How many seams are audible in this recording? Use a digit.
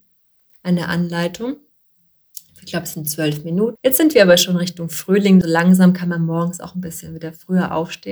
2